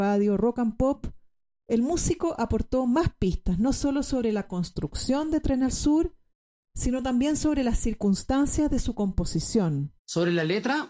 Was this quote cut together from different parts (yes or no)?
yes